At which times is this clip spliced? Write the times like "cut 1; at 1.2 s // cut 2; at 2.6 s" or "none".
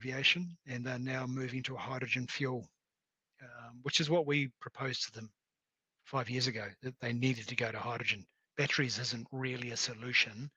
none